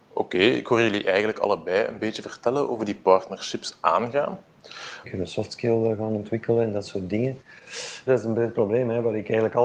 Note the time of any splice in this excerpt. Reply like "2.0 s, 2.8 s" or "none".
5.0 s, 8.1 s